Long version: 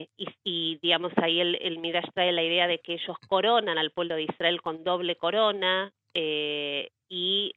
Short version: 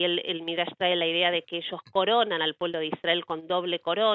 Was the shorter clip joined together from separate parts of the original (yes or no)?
no